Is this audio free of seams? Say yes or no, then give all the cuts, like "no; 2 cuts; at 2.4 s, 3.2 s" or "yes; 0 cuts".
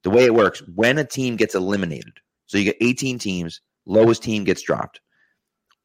yes; 0 cuts